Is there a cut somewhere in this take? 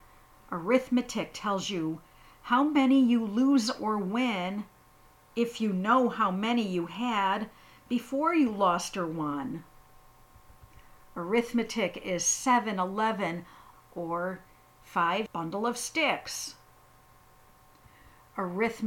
yes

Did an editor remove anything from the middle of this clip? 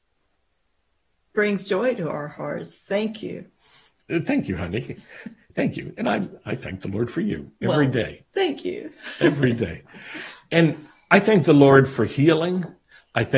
yes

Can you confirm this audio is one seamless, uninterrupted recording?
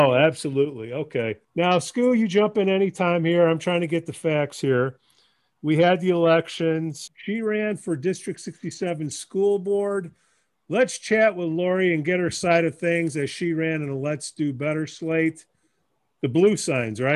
no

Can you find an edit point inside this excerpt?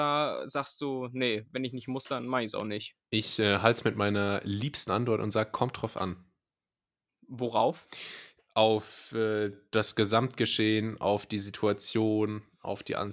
no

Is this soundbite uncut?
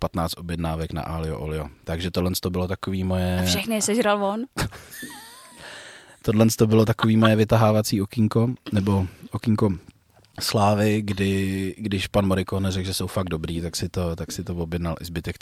yes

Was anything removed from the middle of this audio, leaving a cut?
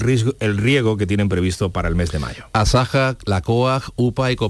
no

